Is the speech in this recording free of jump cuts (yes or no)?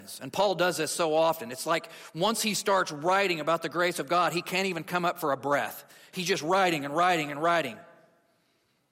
yes